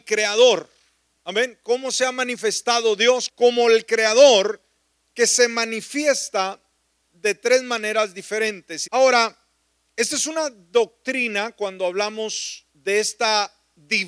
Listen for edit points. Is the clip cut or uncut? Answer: cut